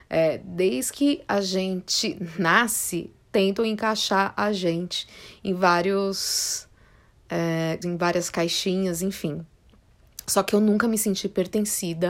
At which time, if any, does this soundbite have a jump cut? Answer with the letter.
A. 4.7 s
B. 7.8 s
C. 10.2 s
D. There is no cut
B